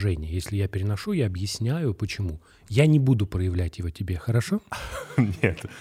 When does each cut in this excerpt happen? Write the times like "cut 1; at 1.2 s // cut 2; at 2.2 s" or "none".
none